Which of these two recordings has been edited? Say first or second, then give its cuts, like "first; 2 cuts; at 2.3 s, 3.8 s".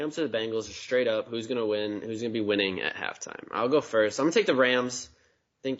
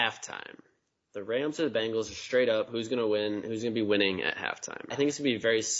second; 1 cut; at 4.9 s